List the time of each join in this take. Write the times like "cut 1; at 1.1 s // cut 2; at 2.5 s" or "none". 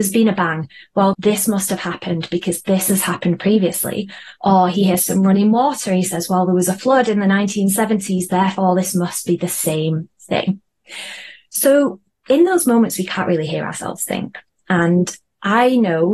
cut 1; at 1.1 s